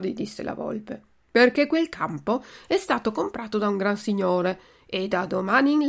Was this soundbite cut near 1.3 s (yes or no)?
yes